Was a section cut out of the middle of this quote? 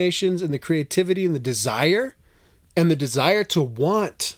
no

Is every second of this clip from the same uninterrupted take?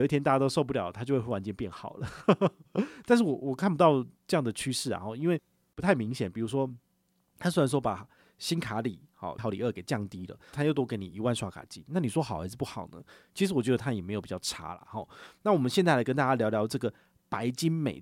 no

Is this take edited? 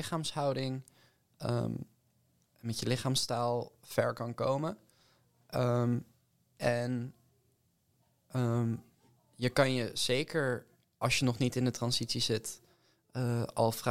no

